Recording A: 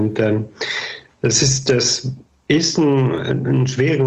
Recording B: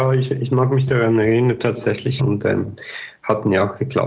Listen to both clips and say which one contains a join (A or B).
B